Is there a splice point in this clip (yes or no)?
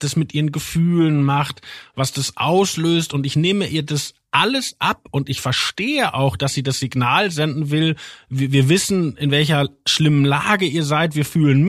no